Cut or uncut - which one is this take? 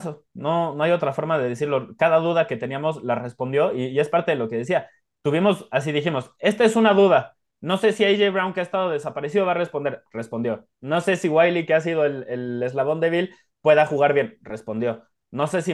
uncut